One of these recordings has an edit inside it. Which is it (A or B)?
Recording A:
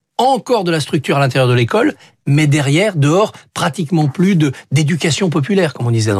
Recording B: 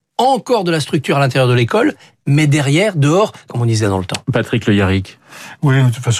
B